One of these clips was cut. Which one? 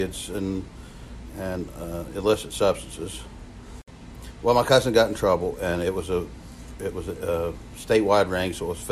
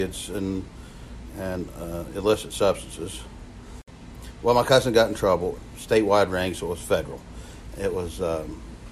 second; 2 cuts; at 5.6 s, 7.7 s

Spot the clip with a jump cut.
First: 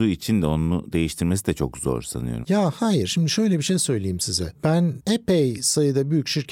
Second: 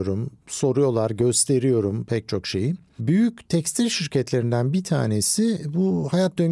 first; 1 cut; at 2.4 s

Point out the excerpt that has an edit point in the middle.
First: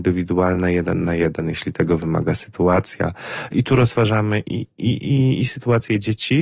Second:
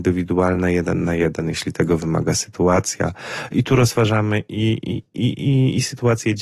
first; 1 cut; at 4.4 s

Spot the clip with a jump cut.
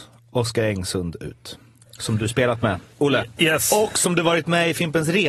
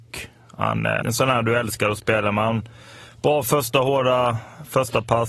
second; 1 cut; at 1.0 s

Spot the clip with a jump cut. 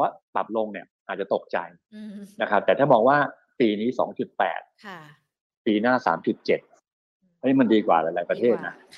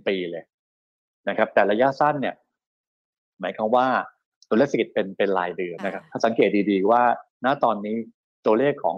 second; 1 cut; at 5.8 s

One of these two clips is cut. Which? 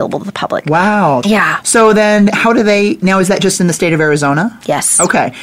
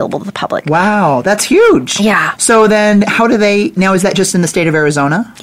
first; 1 cut; at 1.2 s

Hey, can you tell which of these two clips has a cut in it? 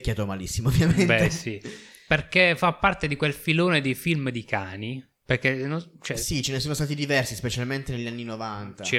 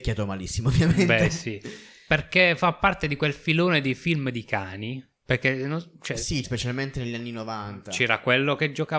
second; 1 cut; at 6.4 s

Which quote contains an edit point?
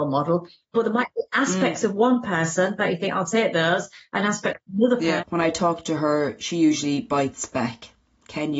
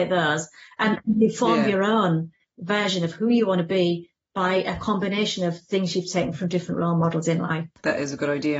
first; 1 cut; at 5.2 s

